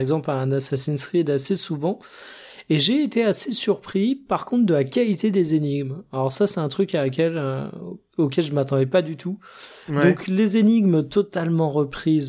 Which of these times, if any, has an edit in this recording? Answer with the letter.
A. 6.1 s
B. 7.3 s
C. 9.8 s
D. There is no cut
D